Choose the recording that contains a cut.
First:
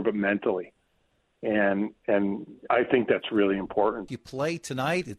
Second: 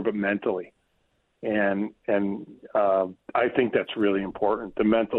first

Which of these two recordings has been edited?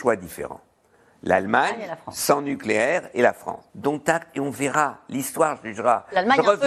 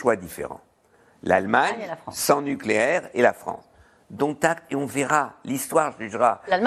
first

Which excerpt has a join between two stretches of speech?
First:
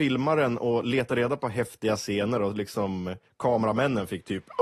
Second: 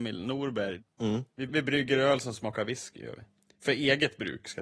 second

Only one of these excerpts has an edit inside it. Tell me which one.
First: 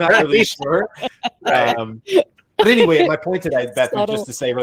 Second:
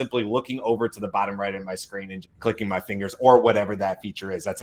second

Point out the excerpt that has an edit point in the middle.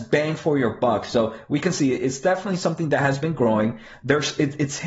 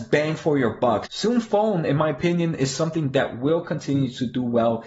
second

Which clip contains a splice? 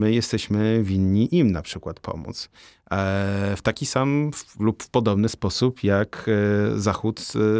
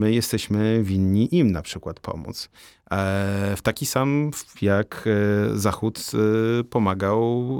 second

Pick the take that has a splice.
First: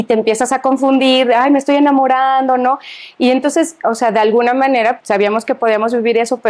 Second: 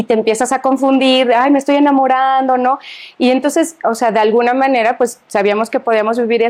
first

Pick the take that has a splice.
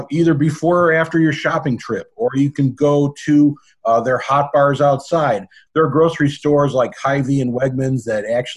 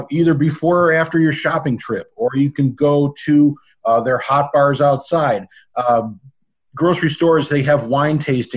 first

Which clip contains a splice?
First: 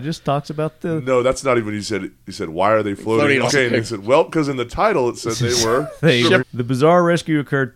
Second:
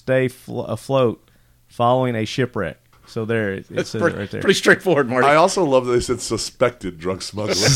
first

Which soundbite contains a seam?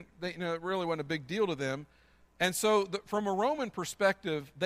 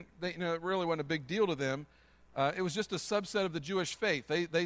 first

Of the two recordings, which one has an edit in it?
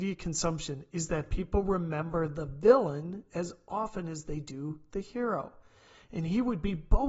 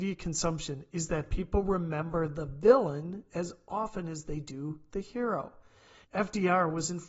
second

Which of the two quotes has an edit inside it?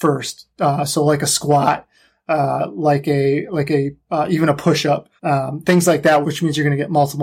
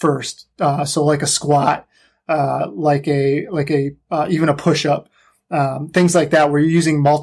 first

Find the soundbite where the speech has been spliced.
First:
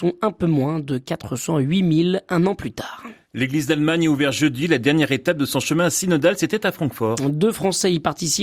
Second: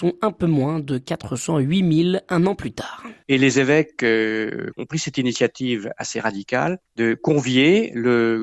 second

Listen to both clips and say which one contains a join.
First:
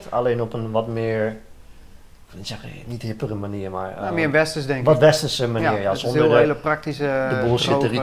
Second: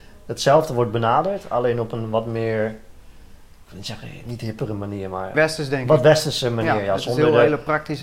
second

